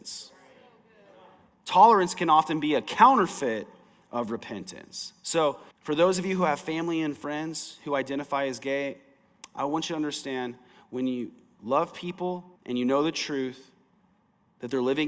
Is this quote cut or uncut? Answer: cut